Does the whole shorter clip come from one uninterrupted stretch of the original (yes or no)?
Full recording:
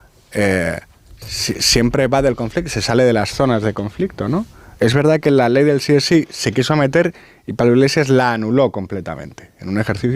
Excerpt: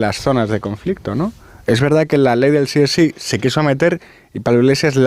yes